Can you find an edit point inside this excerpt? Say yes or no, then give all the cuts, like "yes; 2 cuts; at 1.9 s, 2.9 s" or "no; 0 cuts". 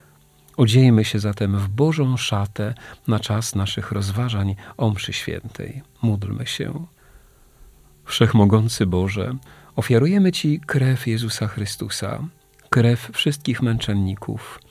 no; 0 cuts